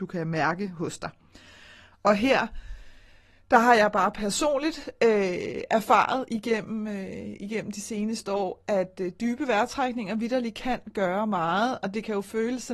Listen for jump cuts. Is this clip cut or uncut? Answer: uncut